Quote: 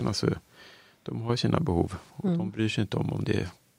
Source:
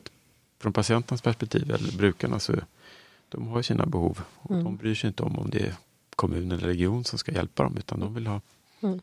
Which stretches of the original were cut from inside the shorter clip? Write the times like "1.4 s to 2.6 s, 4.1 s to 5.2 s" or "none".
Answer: none